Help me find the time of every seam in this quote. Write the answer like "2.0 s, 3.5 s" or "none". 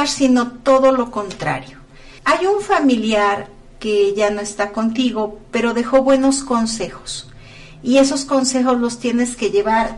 2.2 s